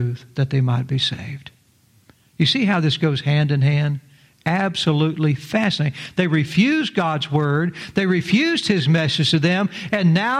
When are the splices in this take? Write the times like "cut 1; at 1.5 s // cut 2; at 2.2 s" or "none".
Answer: none